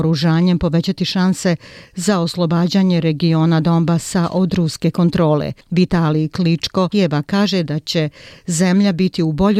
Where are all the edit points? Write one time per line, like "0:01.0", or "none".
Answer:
0:05.6
0:06.9